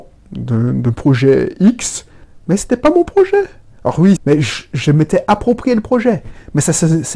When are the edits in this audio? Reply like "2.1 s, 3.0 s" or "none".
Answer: 4.2 s